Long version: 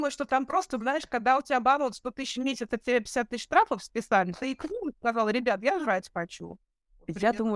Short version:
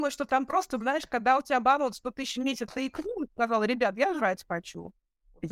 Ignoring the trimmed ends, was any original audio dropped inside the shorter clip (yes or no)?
yes